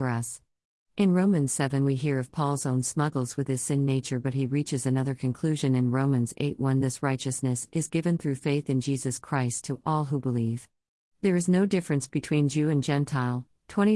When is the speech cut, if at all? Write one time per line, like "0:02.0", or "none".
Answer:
0:06.8